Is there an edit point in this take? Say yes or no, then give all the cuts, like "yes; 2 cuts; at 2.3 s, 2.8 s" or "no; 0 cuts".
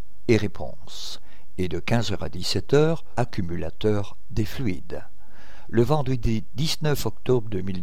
yes; 1 cut; at 3.2 s